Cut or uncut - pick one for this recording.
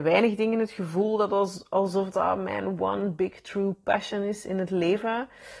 cut